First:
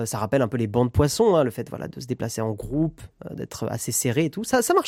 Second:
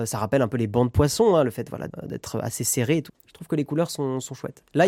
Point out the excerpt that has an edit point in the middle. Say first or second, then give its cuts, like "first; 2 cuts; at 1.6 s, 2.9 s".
second; 2 cuts; at 1.9 s, 3.1 s